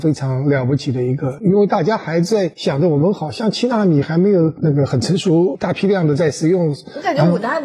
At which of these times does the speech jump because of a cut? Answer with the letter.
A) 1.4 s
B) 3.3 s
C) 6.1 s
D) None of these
D